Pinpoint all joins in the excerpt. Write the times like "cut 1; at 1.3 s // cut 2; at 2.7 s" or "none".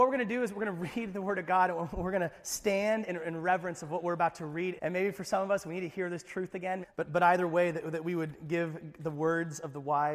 cut 1; at 4.8 s // cut 2; at 6.8 s